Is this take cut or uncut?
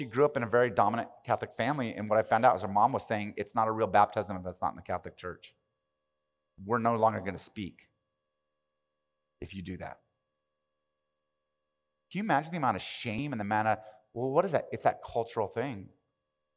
cut